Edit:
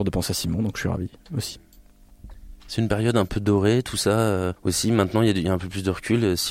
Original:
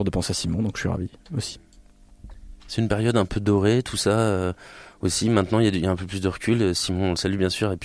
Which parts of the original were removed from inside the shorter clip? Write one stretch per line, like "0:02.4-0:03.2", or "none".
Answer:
0:04.6-0:04.9